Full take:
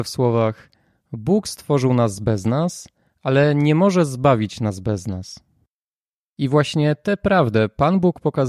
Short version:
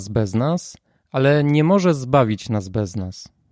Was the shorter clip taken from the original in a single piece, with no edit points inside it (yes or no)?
yes